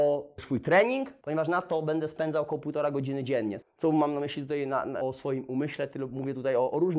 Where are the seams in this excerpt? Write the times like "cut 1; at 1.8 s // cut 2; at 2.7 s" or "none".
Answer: cut 1; at 3.6 s // cut 2; at 5.0 s